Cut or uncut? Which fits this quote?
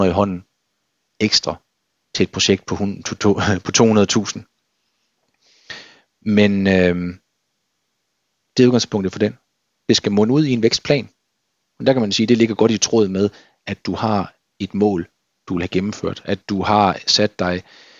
uncut